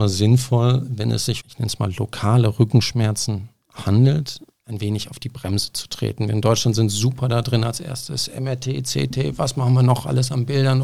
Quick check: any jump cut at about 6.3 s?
no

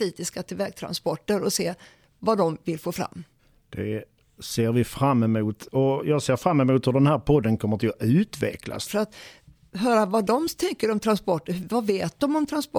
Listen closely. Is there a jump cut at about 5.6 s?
no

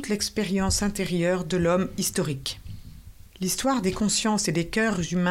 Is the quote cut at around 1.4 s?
no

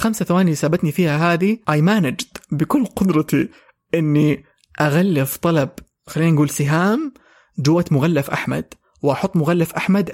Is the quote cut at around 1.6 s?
yes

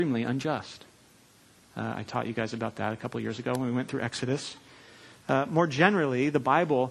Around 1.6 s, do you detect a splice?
yes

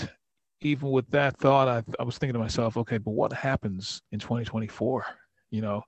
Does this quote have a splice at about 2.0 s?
no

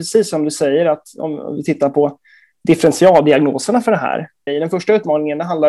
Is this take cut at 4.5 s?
yes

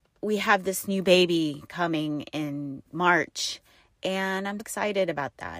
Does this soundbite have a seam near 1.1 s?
no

